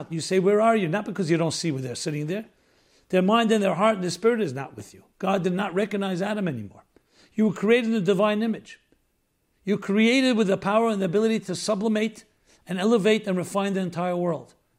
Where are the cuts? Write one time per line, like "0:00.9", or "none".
none